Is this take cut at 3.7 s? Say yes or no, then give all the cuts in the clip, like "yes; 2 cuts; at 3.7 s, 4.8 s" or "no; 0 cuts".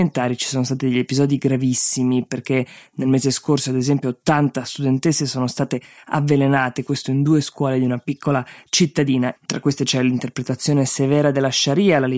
no; 1 cut; at 9.4 s